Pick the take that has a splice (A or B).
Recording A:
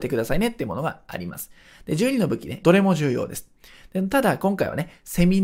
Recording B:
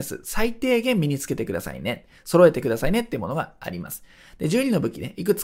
A